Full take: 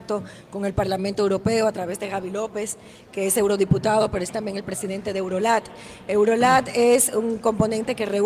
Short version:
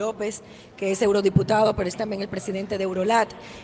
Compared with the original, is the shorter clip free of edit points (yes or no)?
yes